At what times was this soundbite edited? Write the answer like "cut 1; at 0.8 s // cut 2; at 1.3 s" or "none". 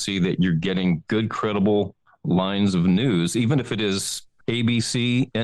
cut 1; at 4.4 s